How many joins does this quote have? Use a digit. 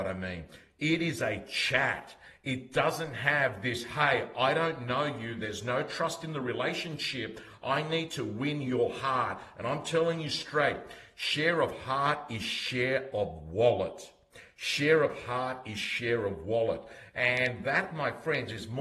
1